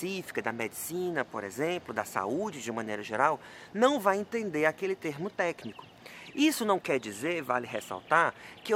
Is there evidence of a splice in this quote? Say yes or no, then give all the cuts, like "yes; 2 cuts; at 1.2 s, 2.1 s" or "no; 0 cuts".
no; 0 cuts